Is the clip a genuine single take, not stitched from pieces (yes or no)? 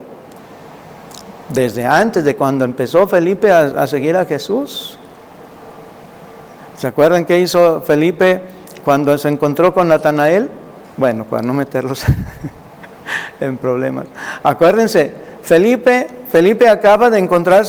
no